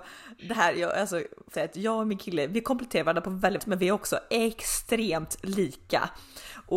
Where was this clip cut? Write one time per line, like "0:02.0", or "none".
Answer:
0:01.5
0:03.6